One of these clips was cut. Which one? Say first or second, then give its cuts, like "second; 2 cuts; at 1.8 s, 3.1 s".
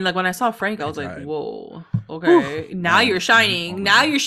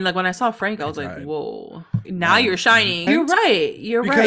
second; 2 cuts; at 2.0 s, 3.1 s